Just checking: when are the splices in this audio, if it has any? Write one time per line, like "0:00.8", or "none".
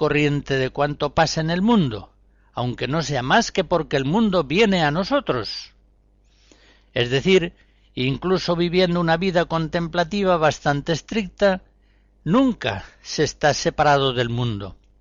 none